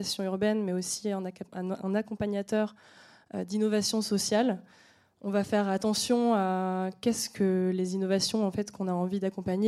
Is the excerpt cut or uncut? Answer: uncut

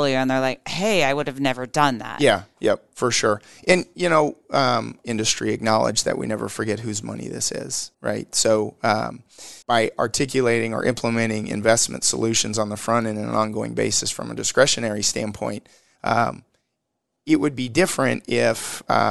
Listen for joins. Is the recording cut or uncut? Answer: cut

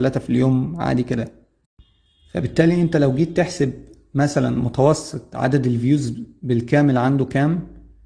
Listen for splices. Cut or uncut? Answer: uncut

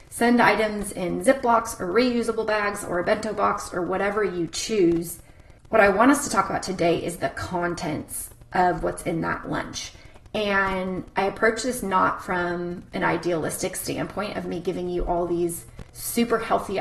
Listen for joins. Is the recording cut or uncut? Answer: uncut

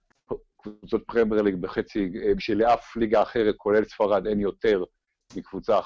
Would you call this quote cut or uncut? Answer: cut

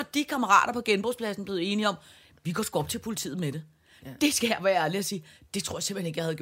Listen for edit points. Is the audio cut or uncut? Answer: uncut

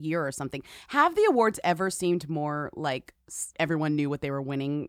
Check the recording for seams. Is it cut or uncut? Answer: cut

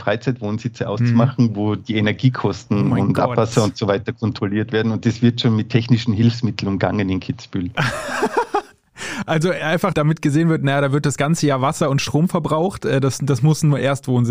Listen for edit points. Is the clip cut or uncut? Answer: uncut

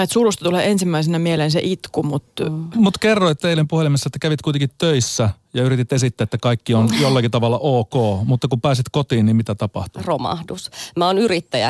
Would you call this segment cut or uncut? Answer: cut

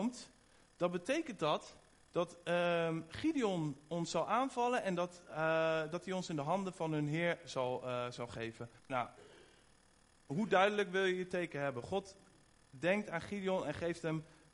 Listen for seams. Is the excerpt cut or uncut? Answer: cut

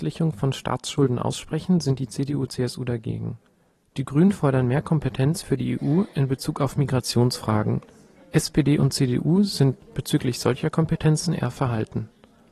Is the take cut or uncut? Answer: uncut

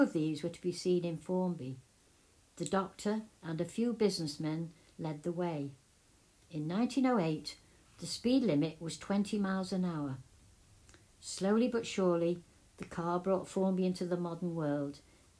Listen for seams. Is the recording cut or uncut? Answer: cut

